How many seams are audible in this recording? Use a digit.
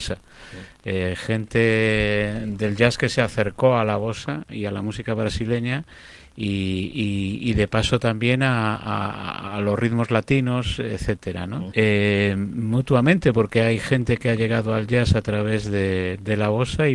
1